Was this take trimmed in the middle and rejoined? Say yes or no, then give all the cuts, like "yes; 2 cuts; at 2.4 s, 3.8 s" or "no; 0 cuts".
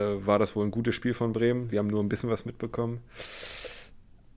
no; 0 cuts